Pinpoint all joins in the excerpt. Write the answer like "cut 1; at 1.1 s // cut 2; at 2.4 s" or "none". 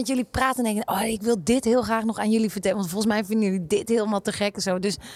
none